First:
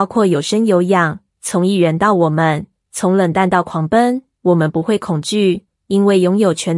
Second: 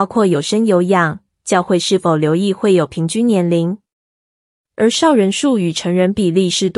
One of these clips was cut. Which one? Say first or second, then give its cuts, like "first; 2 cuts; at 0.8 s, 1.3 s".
first; 1 cut; at 1.3 s